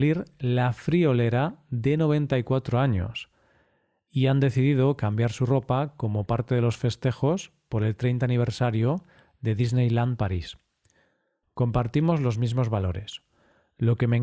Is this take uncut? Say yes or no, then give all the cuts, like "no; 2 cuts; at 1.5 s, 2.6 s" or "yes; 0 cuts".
no; 1 cut; at 11.4 s